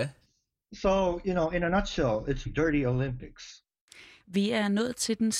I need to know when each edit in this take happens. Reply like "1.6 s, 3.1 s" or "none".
2.5 s, 4.2 s